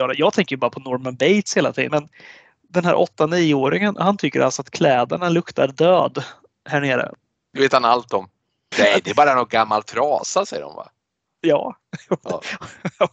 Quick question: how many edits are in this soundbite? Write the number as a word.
two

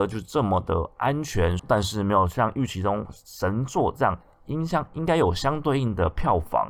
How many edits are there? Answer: one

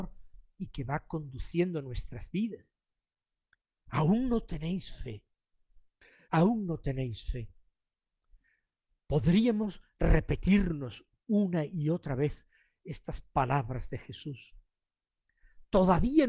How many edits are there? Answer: one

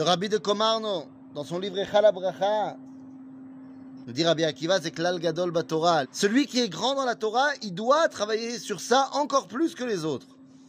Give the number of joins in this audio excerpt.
two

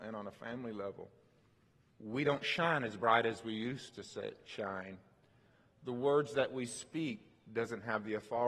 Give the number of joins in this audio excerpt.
one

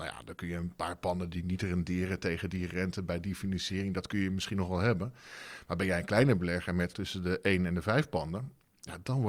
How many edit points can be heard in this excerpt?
one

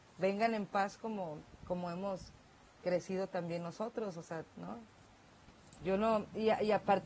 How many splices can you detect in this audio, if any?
two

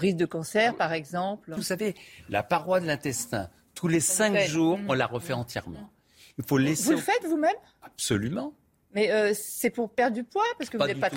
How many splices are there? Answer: one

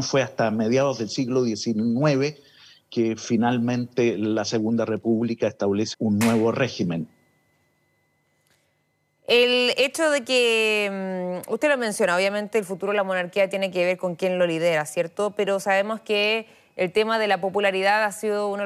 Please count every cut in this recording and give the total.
one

